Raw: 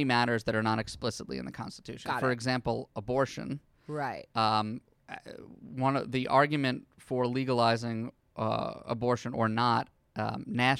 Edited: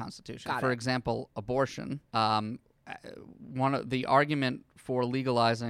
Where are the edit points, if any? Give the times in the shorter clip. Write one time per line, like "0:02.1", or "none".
0:02.1